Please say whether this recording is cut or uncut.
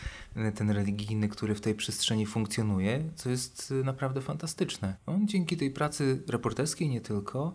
cut